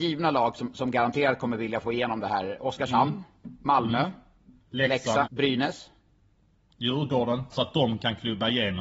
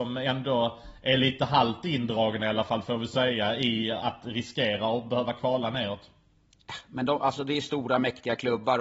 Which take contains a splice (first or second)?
first